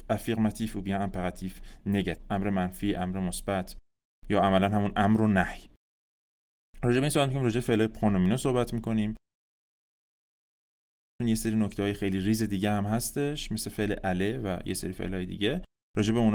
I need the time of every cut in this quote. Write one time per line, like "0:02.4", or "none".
none